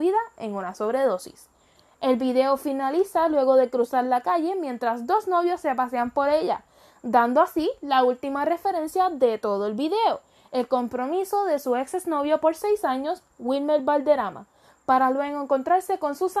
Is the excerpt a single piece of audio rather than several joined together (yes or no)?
yes